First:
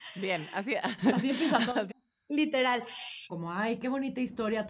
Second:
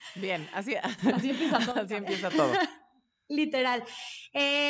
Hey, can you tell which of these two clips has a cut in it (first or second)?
first